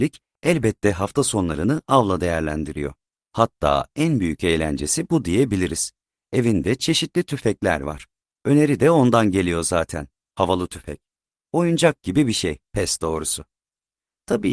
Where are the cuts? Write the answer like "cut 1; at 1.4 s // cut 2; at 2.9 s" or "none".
cut 1; at 12.6 s